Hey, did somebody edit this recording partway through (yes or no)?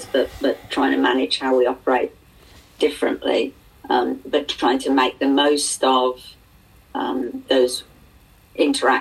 no